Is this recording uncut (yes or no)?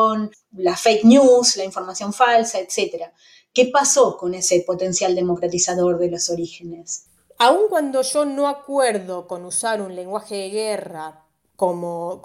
yes